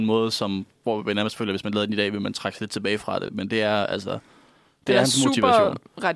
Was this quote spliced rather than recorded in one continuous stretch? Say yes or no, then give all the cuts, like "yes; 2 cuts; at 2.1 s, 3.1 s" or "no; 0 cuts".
no; 0 cuts